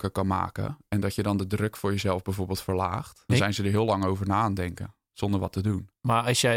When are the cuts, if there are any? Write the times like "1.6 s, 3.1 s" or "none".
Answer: 3.3 s